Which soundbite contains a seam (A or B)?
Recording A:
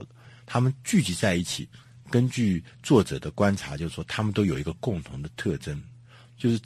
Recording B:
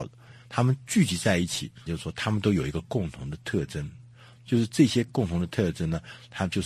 B